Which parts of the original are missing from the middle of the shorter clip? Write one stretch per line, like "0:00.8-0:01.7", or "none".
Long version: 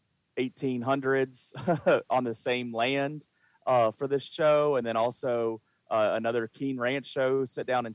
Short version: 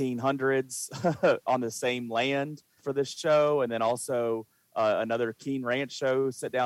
0:03.4-0:03.9